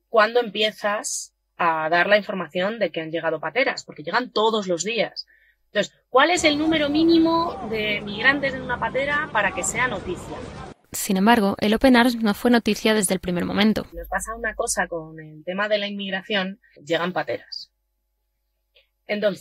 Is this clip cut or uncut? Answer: cut